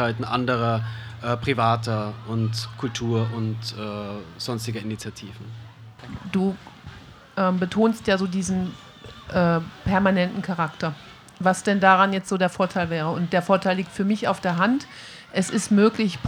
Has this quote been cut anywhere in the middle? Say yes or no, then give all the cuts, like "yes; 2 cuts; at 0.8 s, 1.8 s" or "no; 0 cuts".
no; 0 cuts